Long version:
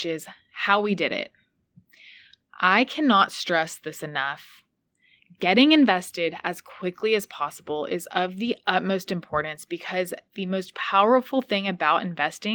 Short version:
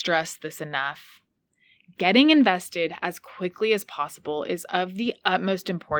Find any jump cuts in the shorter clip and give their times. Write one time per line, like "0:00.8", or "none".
none